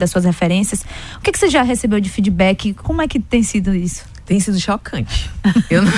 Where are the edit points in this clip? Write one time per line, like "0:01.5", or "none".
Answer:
0:02.8